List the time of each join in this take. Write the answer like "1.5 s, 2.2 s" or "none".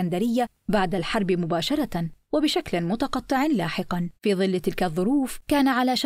4.2 s